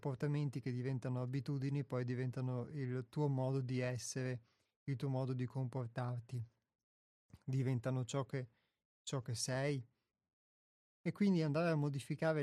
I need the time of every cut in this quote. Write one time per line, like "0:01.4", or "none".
0:10.8